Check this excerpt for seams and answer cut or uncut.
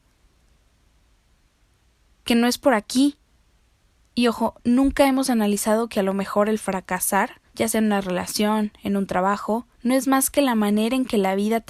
cut